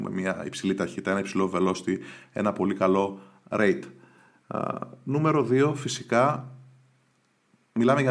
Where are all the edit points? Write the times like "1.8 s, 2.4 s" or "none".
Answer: none